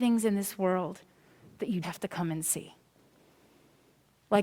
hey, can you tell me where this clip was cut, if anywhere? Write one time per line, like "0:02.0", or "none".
0:01.8